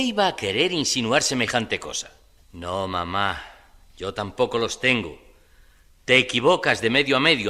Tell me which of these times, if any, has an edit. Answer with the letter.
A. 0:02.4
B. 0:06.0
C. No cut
A